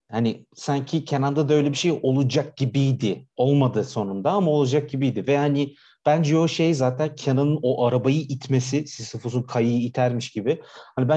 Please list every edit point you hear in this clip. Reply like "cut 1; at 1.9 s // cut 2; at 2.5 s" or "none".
none